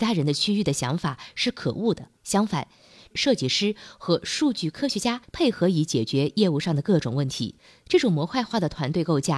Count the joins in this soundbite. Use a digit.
1